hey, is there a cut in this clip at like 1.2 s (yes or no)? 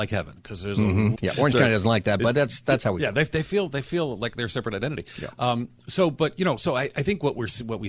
yes